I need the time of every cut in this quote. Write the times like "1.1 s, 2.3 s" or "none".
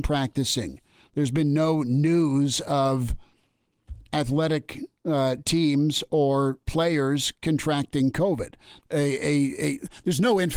8.8 s